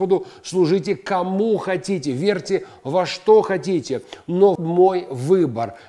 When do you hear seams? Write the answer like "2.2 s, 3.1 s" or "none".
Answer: 4.6 s